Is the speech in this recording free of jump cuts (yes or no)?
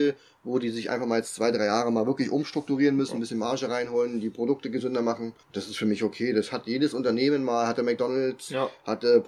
no